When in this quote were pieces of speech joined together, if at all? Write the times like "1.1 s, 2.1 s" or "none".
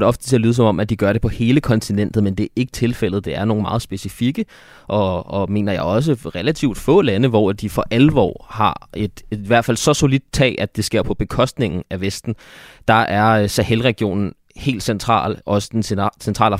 none